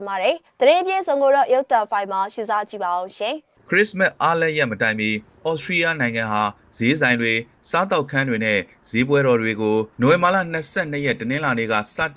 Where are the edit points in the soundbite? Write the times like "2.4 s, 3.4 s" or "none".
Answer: 9.9 s

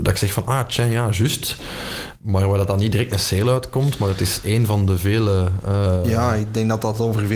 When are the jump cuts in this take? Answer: none

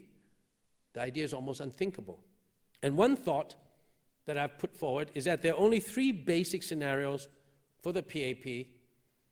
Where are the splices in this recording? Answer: 2.7 s

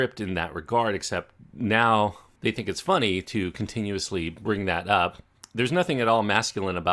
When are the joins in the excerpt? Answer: none

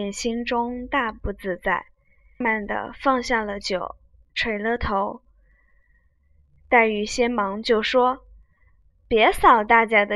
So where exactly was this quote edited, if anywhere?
2.4 s

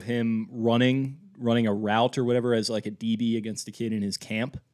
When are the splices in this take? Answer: none

